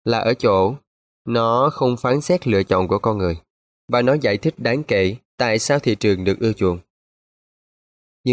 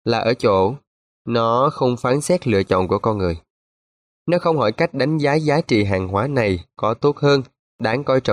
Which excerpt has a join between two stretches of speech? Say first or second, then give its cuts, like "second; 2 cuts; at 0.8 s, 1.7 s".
first; 2 cuts; at 3.7 s, 5.2 s